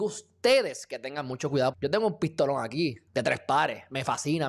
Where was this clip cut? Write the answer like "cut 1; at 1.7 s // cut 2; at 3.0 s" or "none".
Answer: cut 1; at 1.7 s // cut 2; at 3.1 s

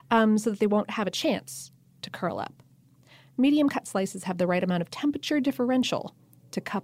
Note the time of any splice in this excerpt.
none

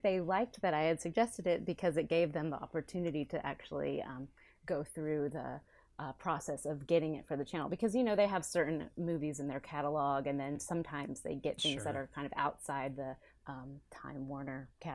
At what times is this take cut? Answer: none

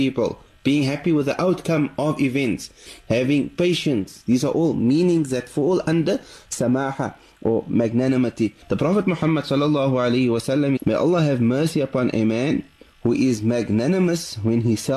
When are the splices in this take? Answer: cut 1; at 8.6 s // cut 2; at 10.8 s

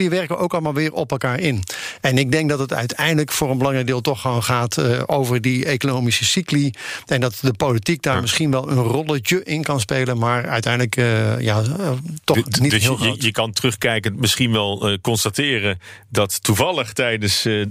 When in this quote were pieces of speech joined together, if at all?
none

